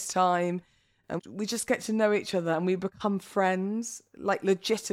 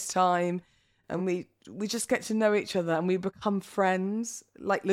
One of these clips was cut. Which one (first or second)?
first